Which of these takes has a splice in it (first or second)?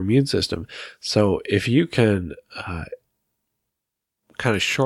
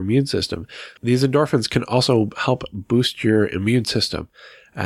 second